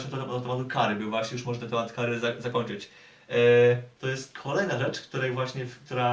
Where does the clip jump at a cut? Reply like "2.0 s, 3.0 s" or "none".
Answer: 4.0 s